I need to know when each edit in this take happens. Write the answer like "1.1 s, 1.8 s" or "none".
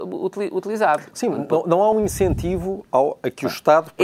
1.9 s